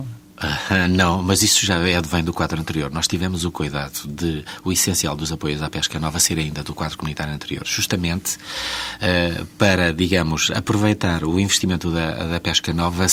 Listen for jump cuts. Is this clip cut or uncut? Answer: uncut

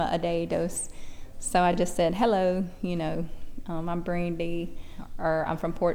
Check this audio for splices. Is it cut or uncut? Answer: uncut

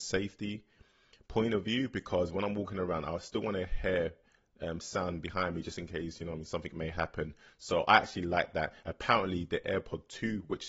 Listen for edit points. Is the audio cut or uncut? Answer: uncut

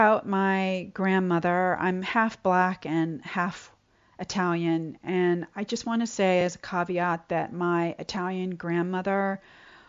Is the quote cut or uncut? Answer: uncut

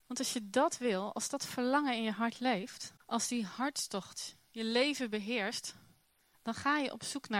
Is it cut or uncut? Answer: cut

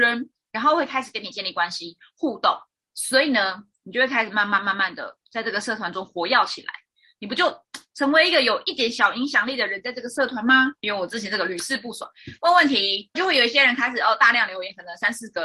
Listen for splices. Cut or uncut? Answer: cut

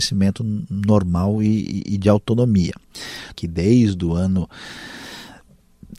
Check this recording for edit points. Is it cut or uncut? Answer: cut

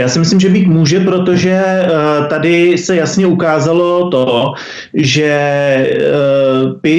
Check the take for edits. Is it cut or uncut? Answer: uncut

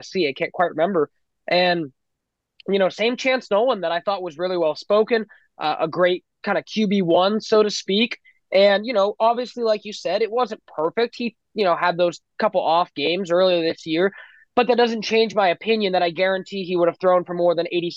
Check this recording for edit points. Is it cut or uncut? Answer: uncut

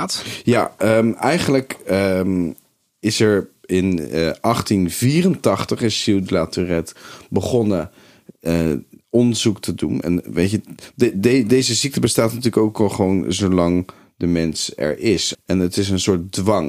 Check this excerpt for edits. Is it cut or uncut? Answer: cut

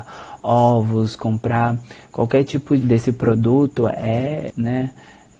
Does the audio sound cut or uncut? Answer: cut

